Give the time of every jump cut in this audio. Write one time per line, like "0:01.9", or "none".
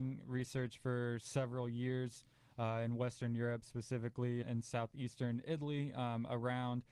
0:04.4